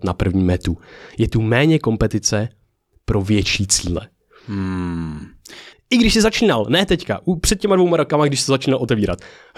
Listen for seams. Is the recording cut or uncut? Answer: cut